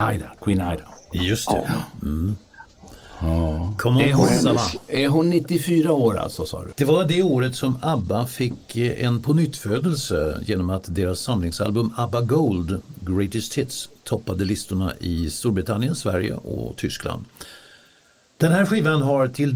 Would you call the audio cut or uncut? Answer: cut